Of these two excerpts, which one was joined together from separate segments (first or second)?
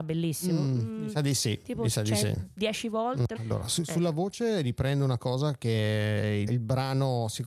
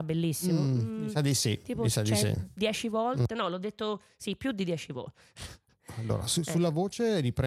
first